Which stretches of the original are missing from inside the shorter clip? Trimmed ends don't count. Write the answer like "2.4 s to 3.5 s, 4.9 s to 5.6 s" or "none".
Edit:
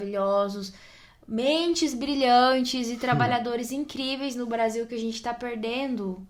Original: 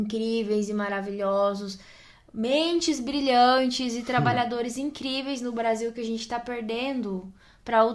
none